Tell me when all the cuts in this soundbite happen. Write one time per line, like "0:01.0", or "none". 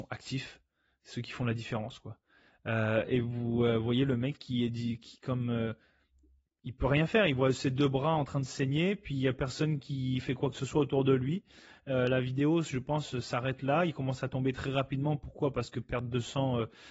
none